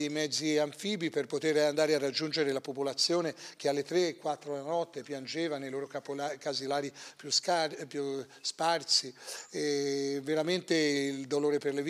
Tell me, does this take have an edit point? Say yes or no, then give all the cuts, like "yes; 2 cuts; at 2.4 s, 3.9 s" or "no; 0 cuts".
no; 0 cuts